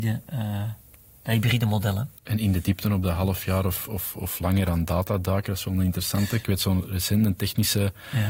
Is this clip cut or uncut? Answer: uncut